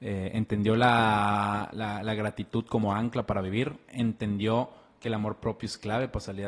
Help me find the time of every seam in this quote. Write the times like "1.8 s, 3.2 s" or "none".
1.7 s

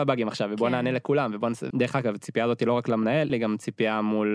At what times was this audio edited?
1.7 s, 3.3 s

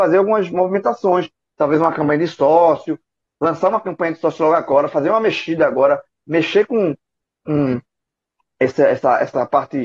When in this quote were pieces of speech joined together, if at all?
none

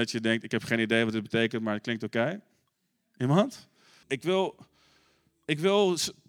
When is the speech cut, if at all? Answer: 4.0 s

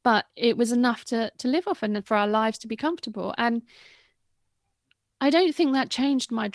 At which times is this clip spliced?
none

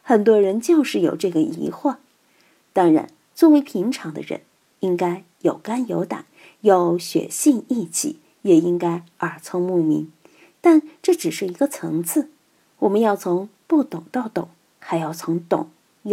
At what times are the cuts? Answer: none

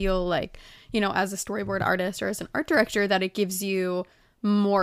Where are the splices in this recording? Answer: none

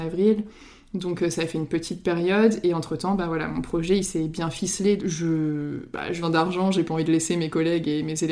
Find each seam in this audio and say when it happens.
5.0 s, 6.2 s

